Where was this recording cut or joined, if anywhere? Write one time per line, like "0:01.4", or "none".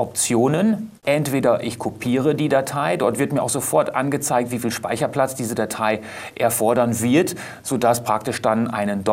0:01.0

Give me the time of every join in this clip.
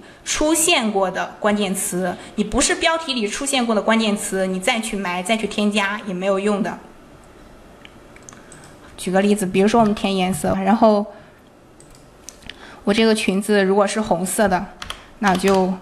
0:08.9
0:10.5

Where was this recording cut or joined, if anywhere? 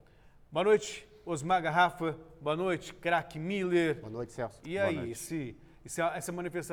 none

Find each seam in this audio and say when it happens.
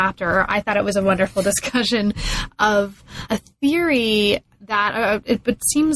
0:03.3

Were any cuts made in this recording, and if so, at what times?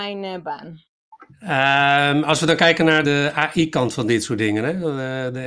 0:01.3
0:03.0

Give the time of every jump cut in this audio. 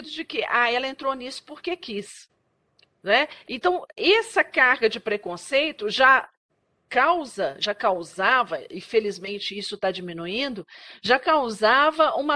0:03.4

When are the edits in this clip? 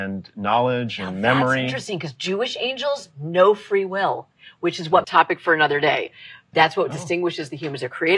0:05.0
0:06.5

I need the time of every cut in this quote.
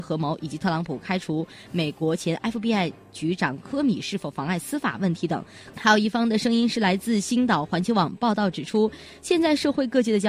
0:05.7

